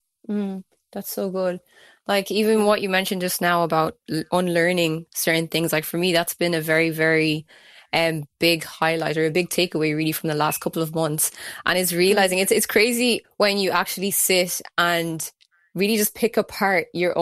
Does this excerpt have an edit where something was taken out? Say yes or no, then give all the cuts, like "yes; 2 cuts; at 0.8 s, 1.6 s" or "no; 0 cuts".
yes; 1 cut; at 13.2 s